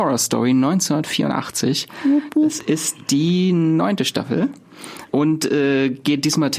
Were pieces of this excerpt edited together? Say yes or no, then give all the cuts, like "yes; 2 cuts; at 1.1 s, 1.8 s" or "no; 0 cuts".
yes; 1 cut; at 5.1 s